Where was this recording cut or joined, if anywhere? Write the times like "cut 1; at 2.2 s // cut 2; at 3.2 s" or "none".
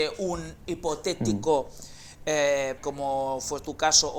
cut 1; at 2.8 s